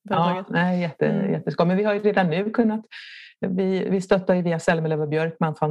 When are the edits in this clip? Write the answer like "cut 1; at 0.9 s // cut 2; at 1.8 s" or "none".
none